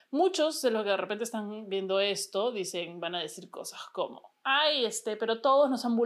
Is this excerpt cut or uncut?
uncut